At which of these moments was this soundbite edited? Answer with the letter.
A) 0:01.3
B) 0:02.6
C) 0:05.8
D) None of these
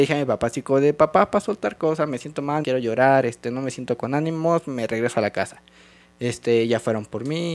B